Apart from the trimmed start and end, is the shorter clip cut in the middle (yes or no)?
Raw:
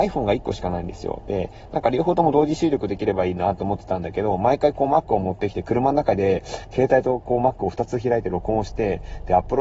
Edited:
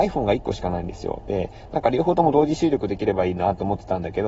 no